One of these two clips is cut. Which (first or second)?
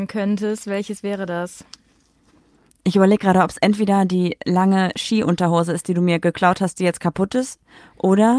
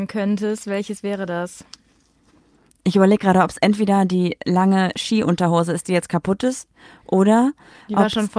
second